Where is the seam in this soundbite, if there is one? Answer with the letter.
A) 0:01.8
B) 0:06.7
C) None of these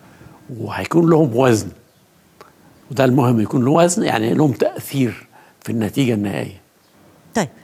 C